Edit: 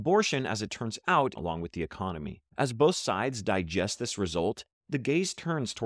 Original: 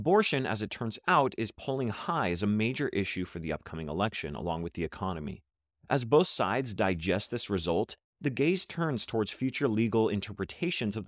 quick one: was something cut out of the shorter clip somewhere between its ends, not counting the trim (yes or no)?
yes